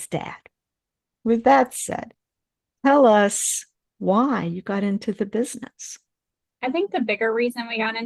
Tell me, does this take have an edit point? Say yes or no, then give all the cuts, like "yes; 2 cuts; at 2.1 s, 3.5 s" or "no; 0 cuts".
no; 0 cuts